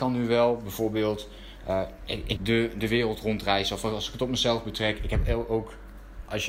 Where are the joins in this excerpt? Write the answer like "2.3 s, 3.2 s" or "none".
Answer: 2.4 s